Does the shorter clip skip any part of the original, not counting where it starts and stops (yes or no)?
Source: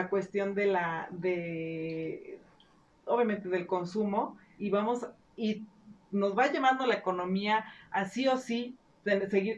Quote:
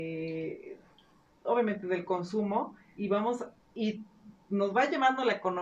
no